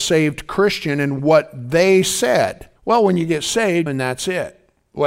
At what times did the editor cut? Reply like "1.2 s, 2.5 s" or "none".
2.8 s, 3.9 s